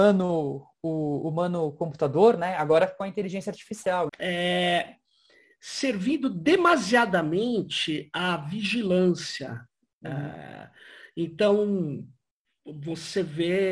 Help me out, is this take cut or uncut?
cut